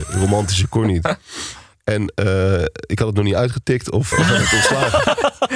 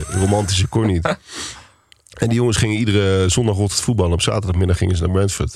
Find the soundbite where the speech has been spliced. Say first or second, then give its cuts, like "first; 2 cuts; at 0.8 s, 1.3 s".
first; 2 cuts; at 1.7 s, 4.1 s